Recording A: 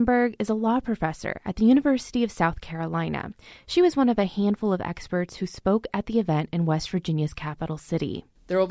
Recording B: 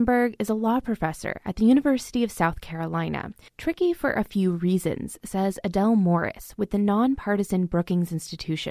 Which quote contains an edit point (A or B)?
B